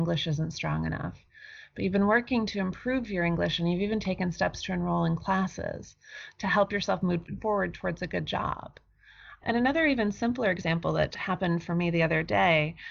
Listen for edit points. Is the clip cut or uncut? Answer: cut